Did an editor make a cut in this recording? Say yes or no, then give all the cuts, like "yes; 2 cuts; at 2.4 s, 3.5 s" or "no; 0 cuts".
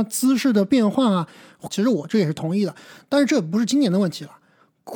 yes; 1 cut; at 1.7 s